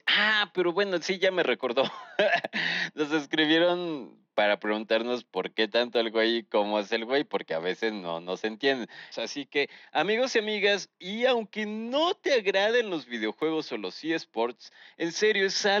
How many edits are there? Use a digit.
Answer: 1